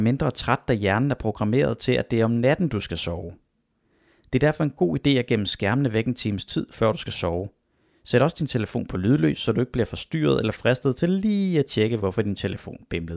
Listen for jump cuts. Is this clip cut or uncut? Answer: uncut